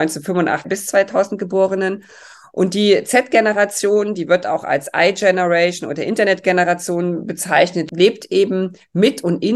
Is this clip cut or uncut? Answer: uncut